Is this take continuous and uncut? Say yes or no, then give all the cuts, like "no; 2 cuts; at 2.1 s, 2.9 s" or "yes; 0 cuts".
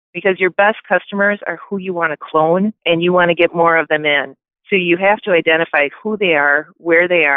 no; 1 cut; at 2.8 s